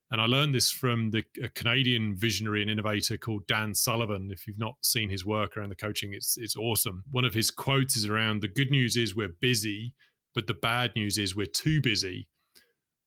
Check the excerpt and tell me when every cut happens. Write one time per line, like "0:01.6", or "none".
none